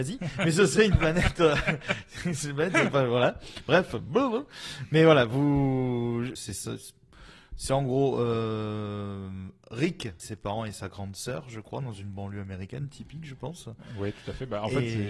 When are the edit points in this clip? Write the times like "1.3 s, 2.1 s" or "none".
6.4 s, 10.2 s